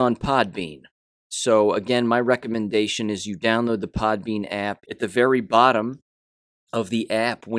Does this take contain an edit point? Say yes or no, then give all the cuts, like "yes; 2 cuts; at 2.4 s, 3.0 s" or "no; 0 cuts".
yes; 1 cut; at 4.8 s